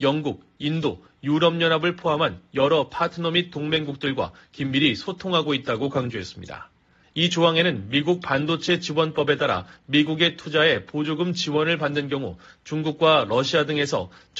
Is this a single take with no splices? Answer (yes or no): no